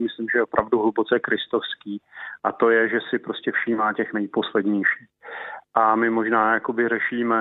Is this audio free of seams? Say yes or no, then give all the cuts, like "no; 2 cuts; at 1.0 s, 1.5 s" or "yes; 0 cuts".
yes; 0 cuts